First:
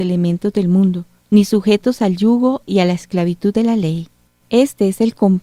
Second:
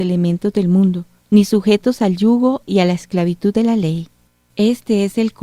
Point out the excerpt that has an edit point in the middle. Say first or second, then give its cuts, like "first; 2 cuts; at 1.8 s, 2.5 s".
first; 1 cut; at 4.4 s